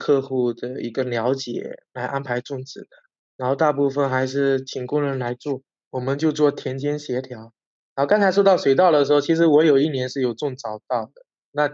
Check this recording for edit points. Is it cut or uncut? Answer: uncut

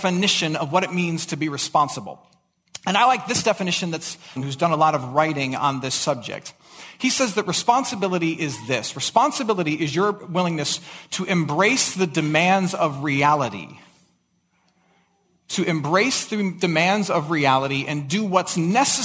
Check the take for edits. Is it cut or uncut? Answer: cut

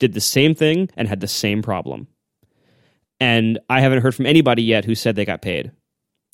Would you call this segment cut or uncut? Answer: uncut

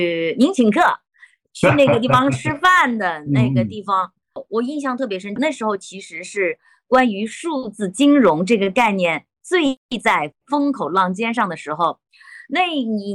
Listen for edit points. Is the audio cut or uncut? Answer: cut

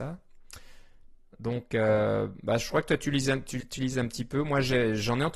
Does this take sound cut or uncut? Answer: uncut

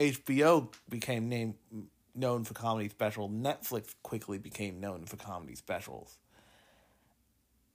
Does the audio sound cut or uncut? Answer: uncut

